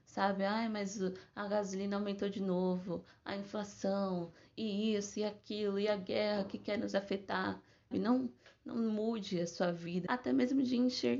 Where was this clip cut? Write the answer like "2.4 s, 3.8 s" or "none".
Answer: 7.9 s, 10.1 s